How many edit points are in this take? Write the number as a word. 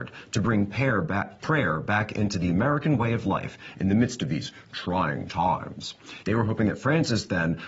one